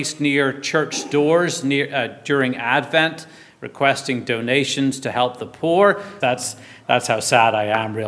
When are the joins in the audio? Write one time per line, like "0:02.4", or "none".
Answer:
0:06.2